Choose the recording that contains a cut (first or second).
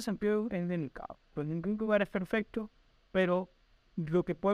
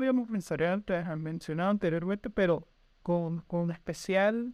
first